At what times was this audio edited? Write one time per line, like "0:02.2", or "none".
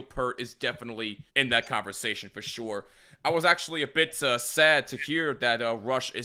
0:01.3